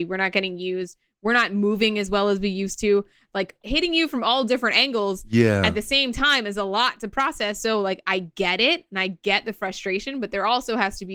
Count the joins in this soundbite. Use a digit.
0